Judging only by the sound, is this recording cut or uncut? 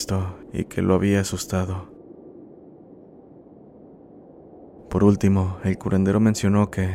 uncut